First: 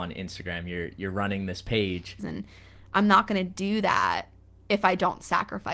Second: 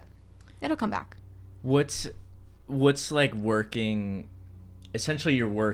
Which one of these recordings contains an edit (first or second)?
first